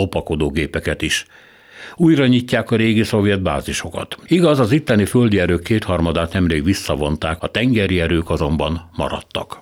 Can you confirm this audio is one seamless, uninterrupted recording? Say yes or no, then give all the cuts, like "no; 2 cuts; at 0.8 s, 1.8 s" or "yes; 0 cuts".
no; 2 cuts; at 4.3 s, 7.4 s